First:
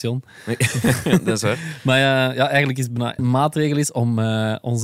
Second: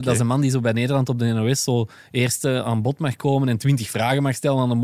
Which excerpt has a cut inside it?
first; 1 cut; at 3.2 s

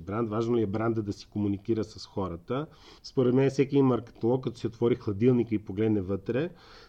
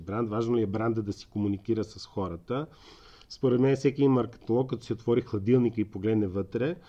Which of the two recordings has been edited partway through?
first; 1 cut; at 3.0 s

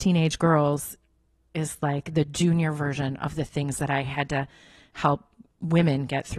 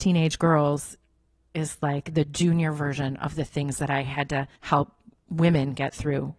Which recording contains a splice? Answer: second; 1 cut; at 4.6 s

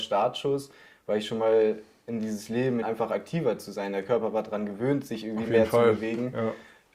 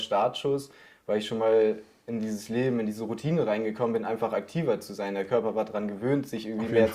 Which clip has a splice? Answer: first; 1 cut; at 2.8 s

